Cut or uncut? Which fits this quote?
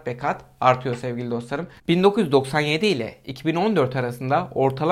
cut